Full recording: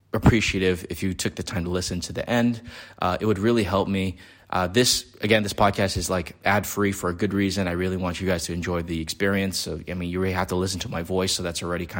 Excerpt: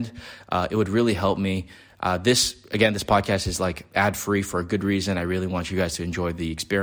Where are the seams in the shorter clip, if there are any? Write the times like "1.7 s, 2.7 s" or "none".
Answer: none